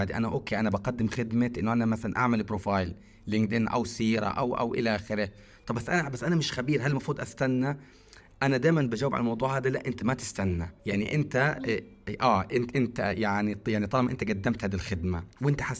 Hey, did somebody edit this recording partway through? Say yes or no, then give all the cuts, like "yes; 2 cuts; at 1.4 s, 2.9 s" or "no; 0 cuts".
yes; 1 cut; at 10.8 s